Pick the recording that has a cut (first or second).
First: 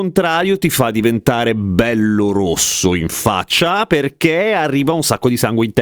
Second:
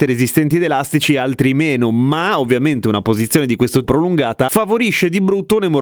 second